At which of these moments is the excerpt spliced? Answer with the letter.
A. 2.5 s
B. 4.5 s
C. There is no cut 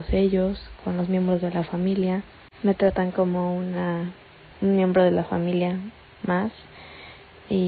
B